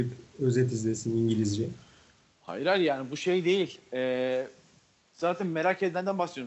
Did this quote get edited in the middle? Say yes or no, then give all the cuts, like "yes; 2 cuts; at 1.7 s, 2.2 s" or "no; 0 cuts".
no; 0 cuts